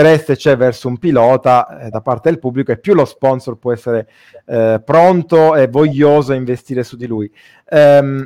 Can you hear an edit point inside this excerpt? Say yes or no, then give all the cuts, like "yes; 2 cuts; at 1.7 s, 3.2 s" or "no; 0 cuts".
no; 0 cuts